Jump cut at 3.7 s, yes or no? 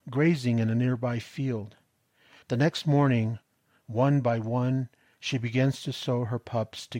no